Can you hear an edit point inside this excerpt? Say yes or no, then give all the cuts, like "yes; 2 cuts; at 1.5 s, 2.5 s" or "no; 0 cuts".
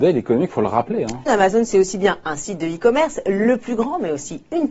yes; 1 cut; at 1.3 s